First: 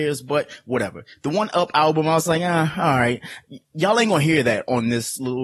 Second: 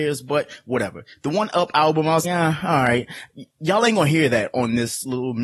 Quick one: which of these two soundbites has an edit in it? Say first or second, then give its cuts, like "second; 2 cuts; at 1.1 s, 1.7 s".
second; 1 cut; at 2.2 s